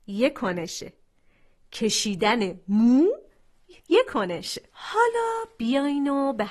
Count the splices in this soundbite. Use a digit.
1